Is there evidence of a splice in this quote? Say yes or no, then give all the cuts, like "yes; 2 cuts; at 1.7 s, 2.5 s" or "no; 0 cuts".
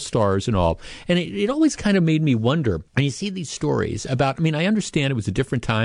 yes; 1 cut; at 2.9 s